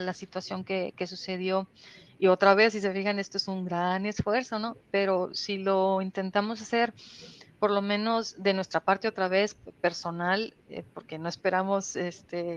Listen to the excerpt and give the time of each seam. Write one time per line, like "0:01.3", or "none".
none